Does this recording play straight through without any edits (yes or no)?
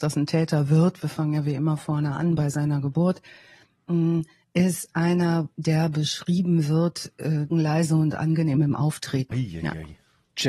no